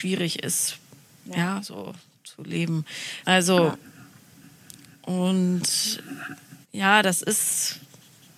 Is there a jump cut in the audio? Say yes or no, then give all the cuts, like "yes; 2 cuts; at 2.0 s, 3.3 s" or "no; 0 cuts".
yes; 2 cuts; at 3.2 s, 6.6 s